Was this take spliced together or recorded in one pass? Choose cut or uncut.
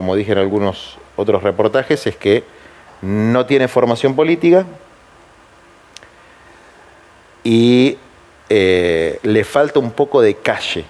uncut